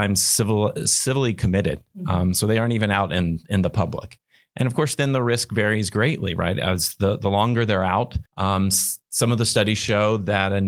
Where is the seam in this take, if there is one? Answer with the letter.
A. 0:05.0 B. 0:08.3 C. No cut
B